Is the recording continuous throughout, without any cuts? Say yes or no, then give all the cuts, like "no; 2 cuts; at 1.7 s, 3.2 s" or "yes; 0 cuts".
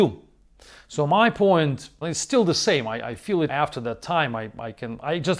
no; 2 cuts; at 2.0 s, 3.5 s